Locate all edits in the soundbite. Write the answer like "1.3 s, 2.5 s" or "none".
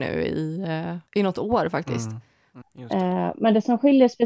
1.1 s, 2.6 s